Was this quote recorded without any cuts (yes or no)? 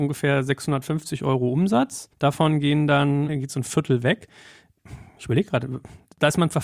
no